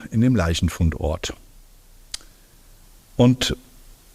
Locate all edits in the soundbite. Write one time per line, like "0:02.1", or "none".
none